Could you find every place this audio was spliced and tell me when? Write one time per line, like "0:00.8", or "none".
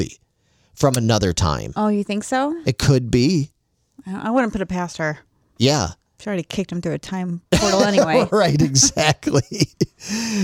none